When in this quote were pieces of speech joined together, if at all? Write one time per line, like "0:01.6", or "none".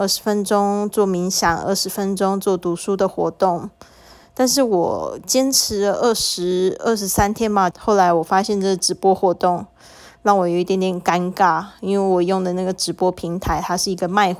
0:07.7